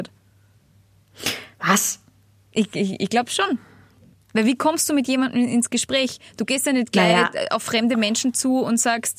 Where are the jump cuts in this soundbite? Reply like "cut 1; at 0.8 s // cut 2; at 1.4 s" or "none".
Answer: none